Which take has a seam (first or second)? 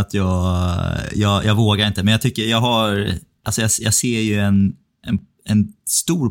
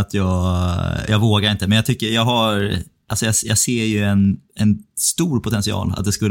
second